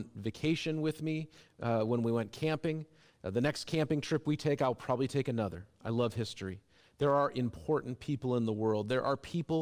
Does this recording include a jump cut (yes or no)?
no